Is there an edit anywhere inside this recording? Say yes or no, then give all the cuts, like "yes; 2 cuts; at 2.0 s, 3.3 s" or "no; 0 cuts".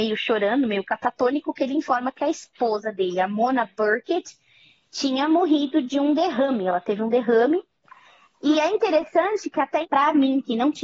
yes; 1 cut; at 9.8 s